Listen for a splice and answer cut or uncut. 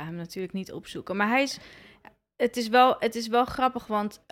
uncut